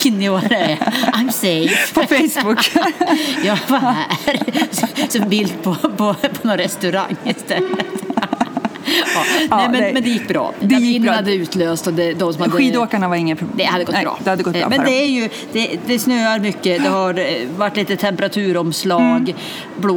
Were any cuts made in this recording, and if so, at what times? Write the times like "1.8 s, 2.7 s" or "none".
none